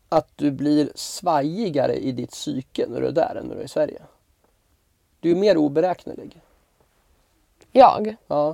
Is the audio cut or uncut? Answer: uncut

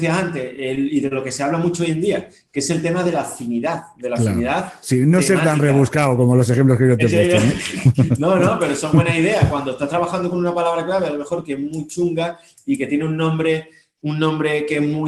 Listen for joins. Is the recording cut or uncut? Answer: uncut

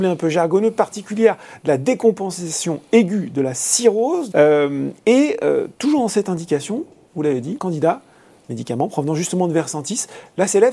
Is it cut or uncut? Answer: cut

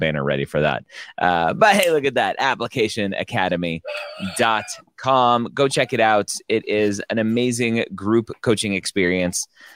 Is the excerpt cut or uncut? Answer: uncut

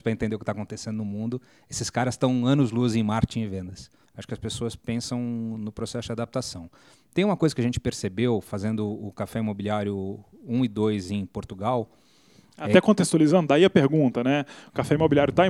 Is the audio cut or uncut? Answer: cut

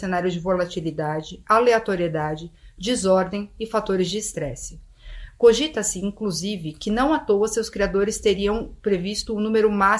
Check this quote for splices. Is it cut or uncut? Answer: uncut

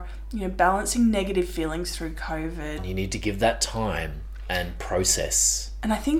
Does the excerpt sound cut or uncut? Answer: cut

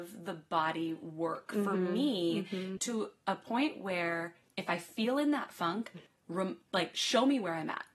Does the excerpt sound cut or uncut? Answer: cut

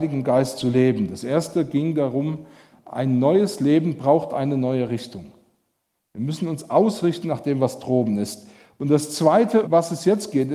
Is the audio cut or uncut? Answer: cut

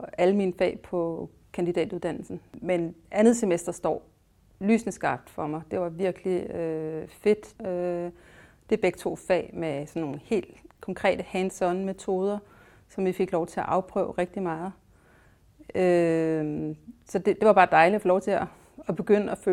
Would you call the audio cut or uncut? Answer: cut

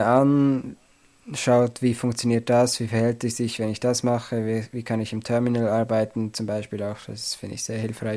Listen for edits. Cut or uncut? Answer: uncut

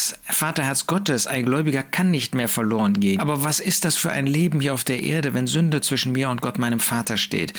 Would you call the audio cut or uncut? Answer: cut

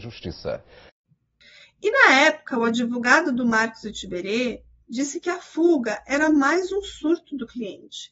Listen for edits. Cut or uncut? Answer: uncut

